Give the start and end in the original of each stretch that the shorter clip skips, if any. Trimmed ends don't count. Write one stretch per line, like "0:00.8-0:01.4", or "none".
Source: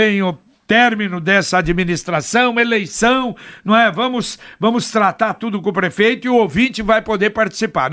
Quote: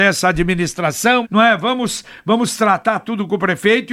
0:02.5-0:03.6